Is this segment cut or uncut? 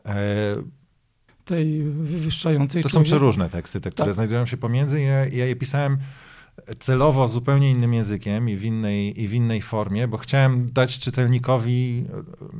cut